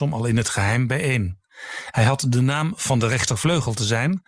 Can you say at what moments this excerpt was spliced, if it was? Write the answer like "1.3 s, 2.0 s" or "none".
1.9 s